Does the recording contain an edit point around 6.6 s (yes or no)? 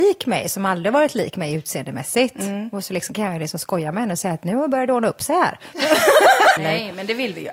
yes